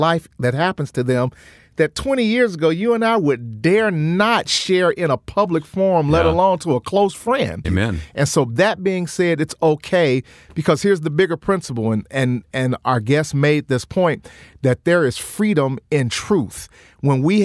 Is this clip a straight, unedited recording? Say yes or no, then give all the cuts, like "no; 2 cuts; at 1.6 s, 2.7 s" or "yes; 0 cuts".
no; 1 cut; at 7.6 s